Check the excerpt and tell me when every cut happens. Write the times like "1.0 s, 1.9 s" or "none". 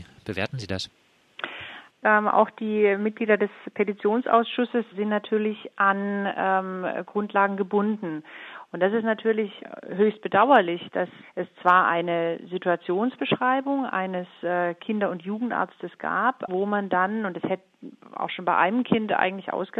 2.0 s, 8.7 s, 16.5 s